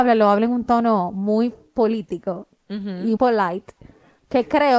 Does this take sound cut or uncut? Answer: cut